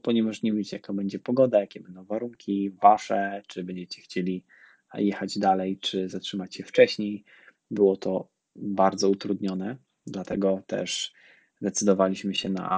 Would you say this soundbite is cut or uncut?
cut